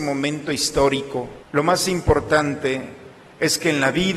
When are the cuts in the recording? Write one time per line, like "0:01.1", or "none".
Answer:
0:01.4

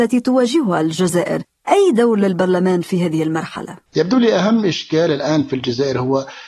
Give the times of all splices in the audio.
0:03.9

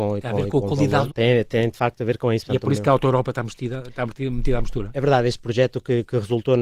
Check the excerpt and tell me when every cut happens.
0:01.1

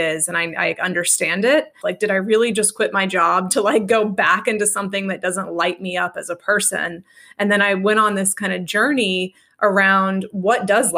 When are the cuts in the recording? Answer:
0:01.8

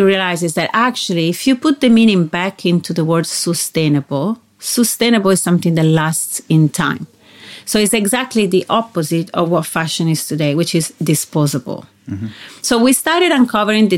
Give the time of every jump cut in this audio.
0:12.6

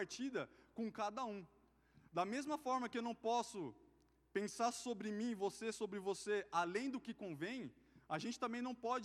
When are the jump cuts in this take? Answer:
none

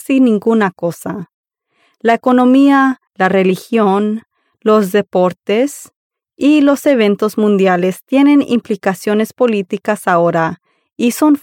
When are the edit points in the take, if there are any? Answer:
0:03.1

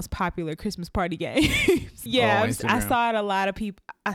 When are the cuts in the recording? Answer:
0:02.1

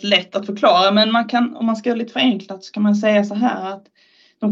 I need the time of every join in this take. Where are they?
none

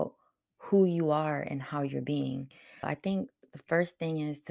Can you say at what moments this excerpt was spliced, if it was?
0:02.8

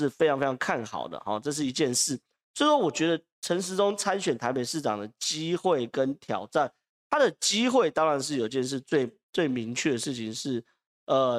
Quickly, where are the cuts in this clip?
none

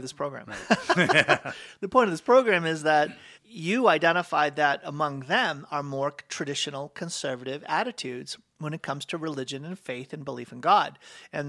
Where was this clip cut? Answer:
0:03.3

